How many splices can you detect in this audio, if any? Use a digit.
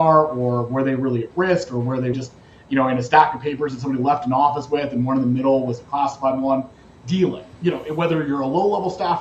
2